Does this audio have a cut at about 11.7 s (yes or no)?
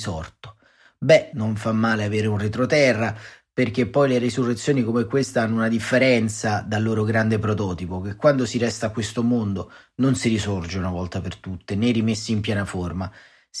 no